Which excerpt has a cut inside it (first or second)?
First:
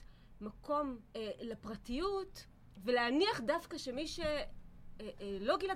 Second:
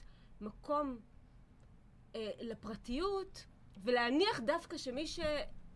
first